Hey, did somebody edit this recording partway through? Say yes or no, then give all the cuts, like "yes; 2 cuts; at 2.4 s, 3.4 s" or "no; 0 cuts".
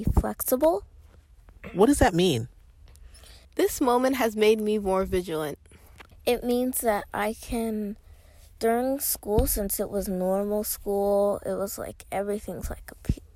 yes; 2 cuts; at 3.4 s, 6.1 s